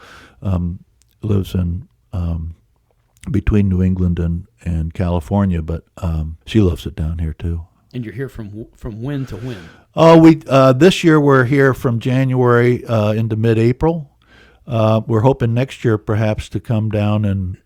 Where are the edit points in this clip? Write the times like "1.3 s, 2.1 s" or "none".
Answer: 6.4 s